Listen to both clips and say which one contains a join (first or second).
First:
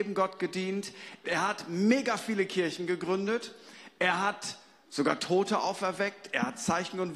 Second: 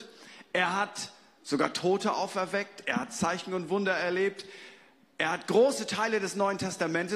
first